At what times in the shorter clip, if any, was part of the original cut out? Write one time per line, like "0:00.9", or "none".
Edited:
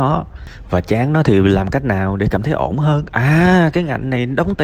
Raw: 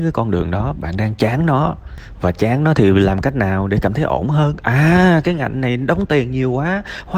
none

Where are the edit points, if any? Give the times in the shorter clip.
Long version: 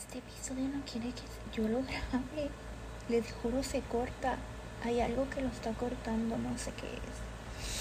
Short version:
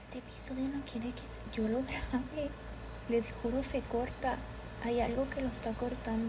none

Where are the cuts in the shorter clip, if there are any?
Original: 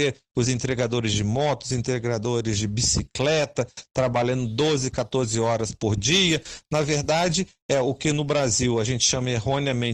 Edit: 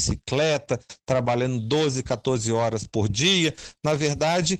none

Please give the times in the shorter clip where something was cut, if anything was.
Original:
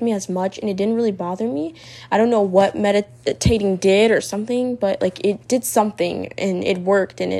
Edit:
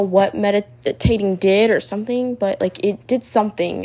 none

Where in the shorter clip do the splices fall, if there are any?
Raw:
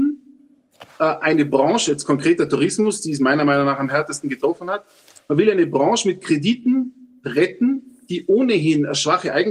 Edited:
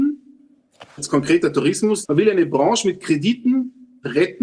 0:01.0
0:02.0

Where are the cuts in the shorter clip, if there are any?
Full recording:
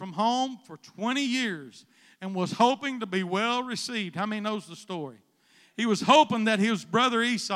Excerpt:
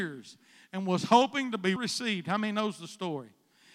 0:01.8

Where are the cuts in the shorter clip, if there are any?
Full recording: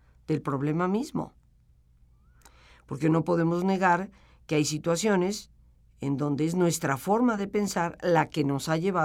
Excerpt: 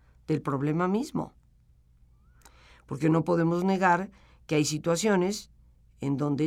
none

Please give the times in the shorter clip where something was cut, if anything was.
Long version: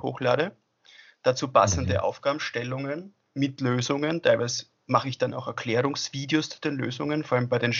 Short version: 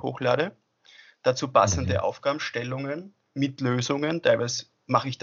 none

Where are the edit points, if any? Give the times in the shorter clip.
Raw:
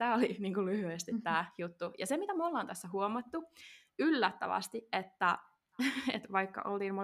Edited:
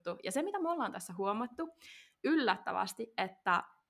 none

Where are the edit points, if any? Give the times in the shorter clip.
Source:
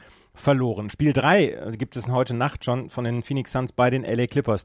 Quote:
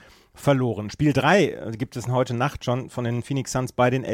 none

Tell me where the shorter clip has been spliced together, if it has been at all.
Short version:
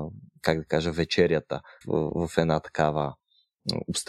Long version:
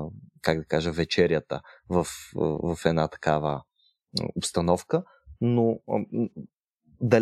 0:01.8

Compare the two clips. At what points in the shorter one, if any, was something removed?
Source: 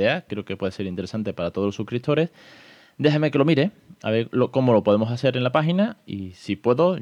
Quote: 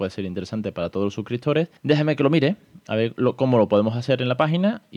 0:01.8

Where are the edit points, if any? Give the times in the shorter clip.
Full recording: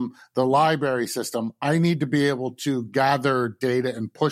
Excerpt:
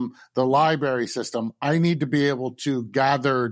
none

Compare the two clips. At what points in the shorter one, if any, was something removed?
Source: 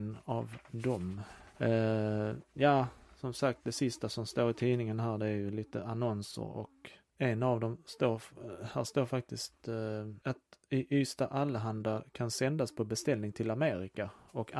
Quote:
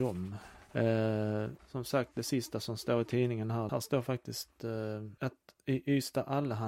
0:01.6
0:03.7

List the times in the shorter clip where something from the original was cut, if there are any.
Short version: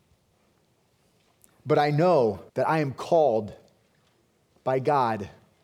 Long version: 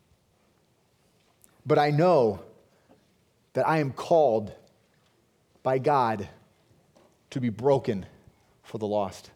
0:02.5

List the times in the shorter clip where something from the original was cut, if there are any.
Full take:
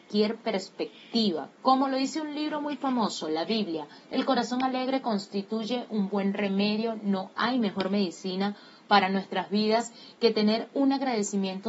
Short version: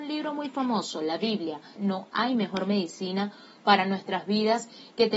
0:01.8

